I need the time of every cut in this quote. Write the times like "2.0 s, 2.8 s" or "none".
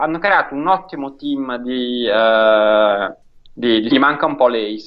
3.9 s